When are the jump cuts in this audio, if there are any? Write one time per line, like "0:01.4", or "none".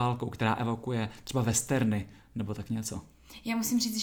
none